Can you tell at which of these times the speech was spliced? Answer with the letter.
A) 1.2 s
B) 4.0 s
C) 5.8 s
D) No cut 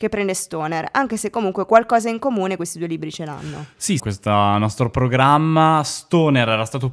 B